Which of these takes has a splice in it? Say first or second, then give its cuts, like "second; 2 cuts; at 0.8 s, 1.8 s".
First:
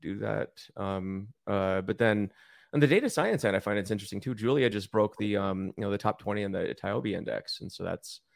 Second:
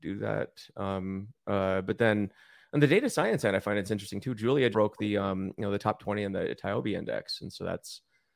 second; 1 cut; at 4.7 s